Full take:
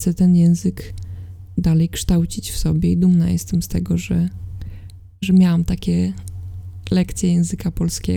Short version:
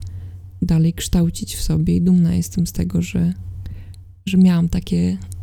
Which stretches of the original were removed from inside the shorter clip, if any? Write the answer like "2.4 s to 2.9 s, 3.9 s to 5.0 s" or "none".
none

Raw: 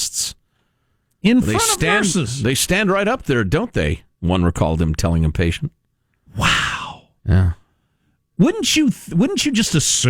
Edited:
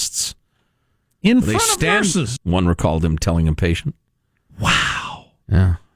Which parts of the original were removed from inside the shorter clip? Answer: 2.4 s to 4.1 s

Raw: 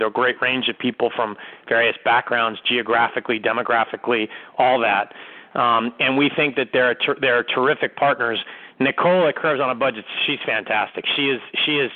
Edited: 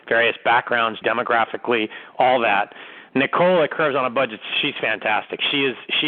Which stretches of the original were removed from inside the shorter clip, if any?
2.6 s to 3.4 s, 5.5 s to 8.7 s

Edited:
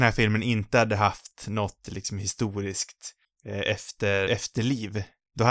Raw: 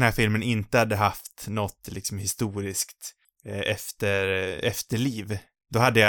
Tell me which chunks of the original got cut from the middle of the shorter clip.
4.3 s to 4.6 s

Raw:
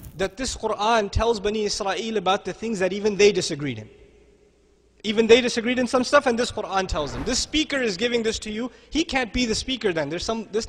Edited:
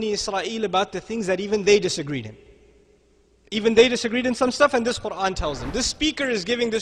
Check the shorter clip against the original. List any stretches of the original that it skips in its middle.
none

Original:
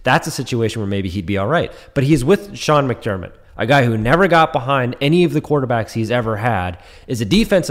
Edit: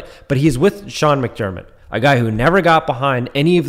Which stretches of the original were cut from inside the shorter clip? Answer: none

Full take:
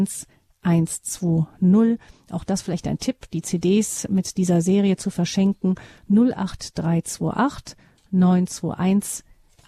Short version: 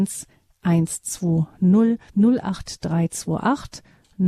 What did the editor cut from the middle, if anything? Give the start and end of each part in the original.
2.1 s to 6.0 s

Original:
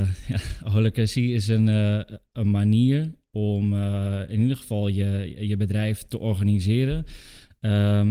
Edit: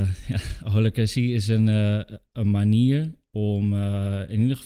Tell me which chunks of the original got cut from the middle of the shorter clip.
none

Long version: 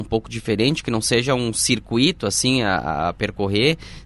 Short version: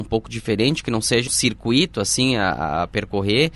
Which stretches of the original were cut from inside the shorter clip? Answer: 1.3 s to 1.5 s

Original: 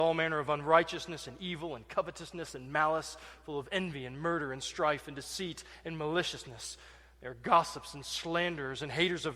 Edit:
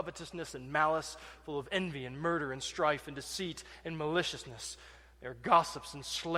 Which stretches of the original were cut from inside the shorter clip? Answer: none

